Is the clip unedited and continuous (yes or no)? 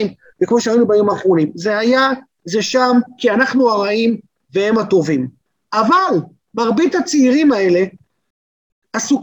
yes